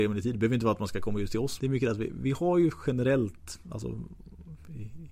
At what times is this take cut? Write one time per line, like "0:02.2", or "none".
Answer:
0:01.6